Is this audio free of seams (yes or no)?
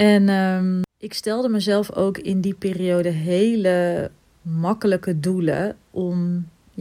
yes